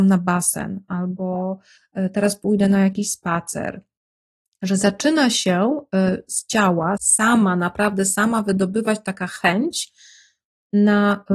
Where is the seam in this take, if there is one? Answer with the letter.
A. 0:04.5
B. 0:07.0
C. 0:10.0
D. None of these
B